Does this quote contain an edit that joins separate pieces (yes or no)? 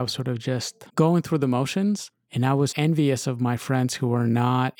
yes